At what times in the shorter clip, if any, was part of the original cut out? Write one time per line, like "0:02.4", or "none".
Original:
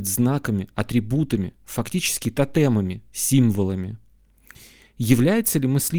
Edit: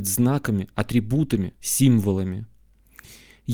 0:01.6